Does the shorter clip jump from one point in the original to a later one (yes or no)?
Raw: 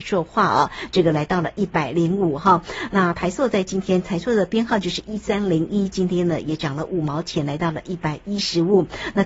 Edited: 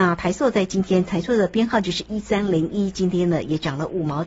no